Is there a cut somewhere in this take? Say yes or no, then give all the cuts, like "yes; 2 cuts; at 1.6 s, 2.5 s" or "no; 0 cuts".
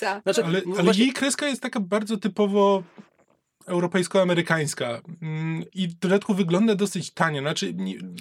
no; 0 cuts